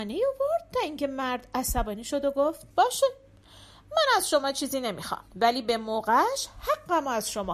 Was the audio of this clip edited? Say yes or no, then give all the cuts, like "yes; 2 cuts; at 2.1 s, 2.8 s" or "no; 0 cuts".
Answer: yes; 2 cuts; at 2.7 s, 5.3 s